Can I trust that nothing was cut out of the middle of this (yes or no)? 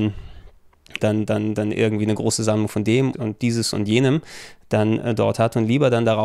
no